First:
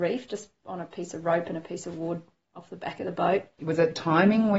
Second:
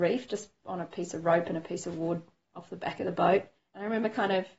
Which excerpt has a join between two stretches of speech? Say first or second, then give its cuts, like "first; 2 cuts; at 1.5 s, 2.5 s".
first; 1 cut; at 3.6 s